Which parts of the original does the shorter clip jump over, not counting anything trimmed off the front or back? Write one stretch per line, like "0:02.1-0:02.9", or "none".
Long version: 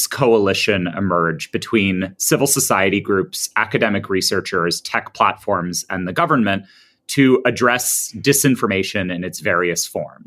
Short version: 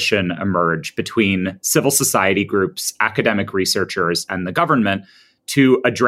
0:04.8-0:05.9